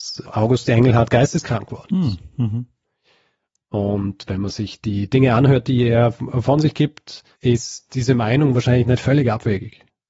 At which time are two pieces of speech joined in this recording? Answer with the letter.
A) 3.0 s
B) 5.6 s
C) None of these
C